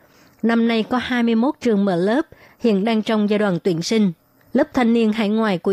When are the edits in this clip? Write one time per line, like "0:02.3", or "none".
0:04.5